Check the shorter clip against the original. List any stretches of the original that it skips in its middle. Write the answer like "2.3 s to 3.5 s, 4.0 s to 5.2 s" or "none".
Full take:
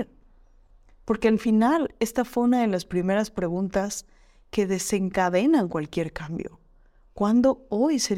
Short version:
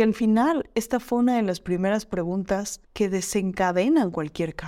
4.1 s to 4.4 s